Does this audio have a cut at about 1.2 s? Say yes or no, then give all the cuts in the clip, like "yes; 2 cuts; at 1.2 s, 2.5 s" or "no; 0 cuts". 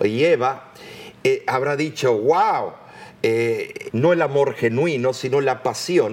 no; 1 cut; at 3.9 s